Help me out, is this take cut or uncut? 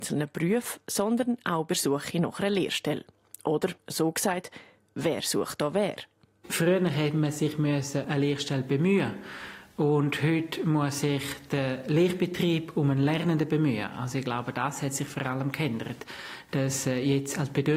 cut